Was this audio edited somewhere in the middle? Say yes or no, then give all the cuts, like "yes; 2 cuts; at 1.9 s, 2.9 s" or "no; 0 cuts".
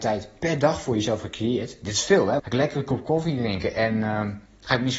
yes; 1 cut; at 2.4 s